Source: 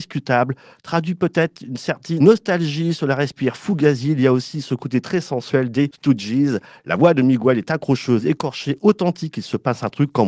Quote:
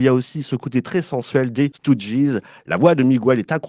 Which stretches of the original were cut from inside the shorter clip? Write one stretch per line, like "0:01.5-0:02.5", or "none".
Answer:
none